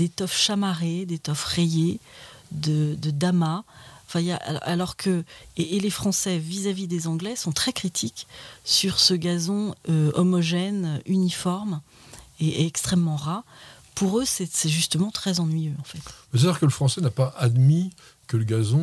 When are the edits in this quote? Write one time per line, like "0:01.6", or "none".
none